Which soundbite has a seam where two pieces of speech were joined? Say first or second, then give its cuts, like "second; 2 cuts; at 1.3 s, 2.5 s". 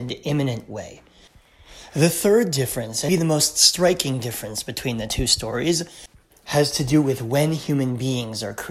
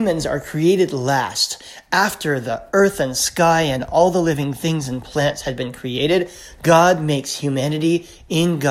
first; 1 cut; at 3.1 s